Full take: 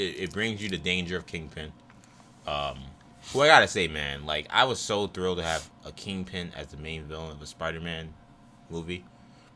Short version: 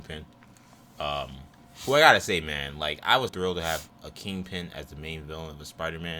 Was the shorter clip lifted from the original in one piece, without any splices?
no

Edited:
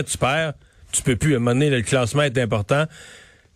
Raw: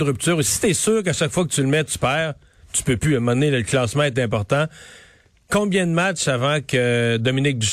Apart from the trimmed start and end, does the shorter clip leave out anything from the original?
no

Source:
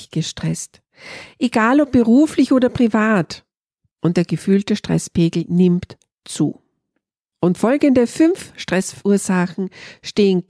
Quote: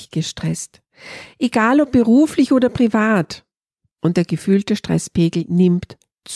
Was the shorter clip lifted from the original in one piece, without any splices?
yes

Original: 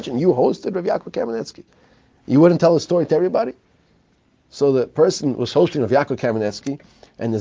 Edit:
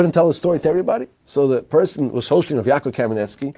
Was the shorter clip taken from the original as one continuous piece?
no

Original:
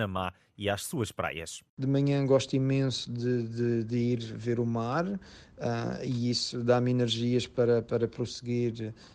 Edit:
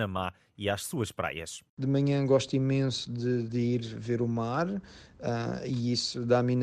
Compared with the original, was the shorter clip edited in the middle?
yes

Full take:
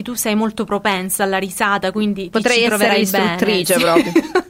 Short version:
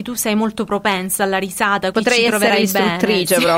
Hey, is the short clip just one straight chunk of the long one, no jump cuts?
no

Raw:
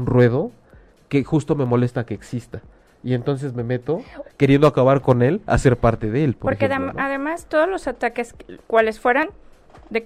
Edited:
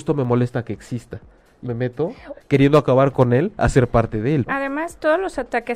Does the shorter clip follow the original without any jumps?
no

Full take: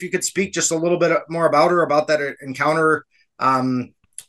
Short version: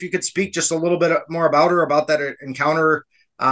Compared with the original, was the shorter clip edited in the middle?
no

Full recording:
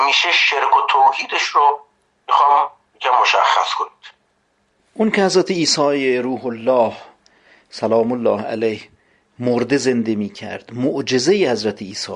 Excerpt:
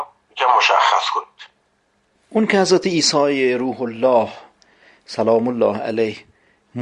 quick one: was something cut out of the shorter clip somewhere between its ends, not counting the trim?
no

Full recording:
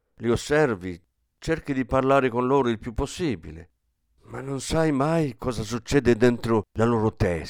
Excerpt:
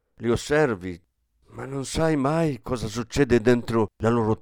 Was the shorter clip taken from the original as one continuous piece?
no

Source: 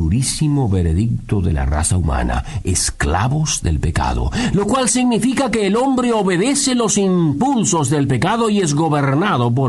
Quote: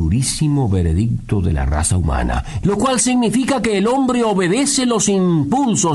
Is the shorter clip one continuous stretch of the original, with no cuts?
no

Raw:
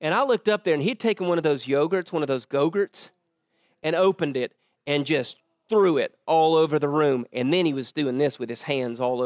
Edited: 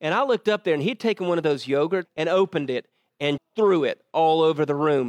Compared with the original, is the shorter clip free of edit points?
no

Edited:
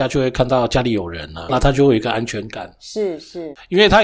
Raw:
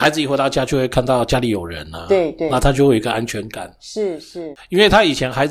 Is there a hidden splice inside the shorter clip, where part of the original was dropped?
yes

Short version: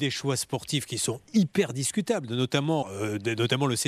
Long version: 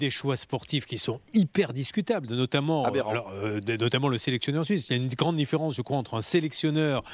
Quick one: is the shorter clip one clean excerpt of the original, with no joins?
no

